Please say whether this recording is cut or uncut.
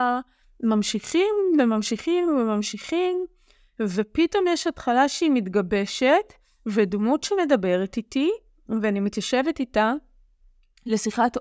uncut